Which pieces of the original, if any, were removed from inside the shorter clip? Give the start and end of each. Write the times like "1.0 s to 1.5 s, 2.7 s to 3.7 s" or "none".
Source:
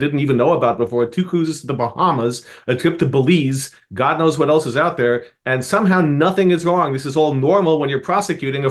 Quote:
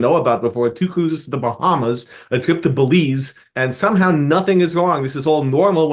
3.9 s to 5.4 s